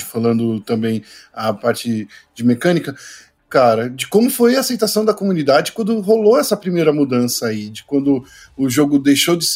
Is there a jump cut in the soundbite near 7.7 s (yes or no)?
no